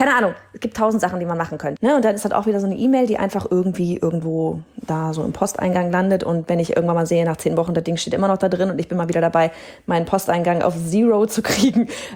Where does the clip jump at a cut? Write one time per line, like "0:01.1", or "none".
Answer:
0:01.8